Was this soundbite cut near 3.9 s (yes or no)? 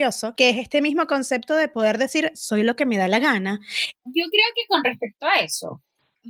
yes